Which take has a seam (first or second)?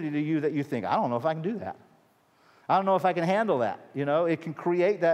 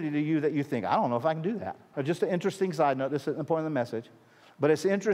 second